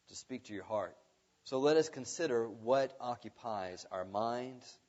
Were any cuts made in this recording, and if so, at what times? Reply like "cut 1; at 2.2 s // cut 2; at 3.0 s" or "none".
cut 1; at 1.3 s